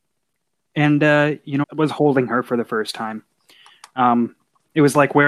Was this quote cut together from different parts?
yes; 1 cut; at 1.6 s

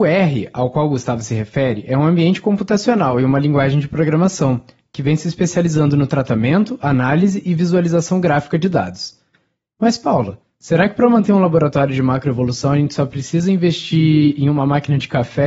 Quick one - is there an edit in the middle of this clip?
no; 0 cuts

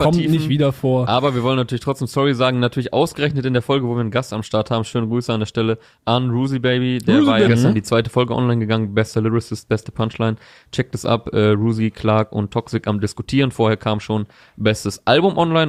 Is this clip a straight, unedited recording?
no; 1 cut; at 7.5 s

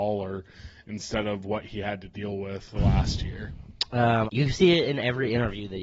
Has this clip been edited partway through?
yes; 1 cut; at 4.3 s

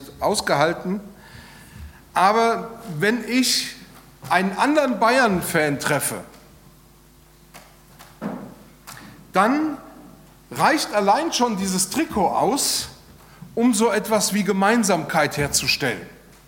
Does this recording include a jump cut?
no; 0 cuts

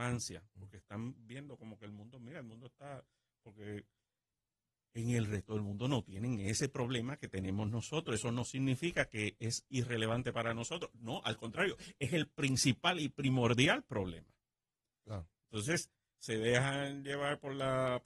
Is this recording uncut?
yes; 0 cuts

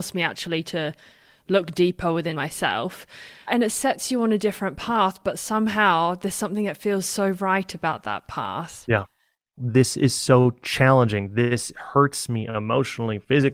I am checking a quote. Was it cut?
yes; 1 cut; at 9.6 s

